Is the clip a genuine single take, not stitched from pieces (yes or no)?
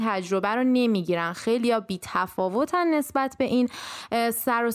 yes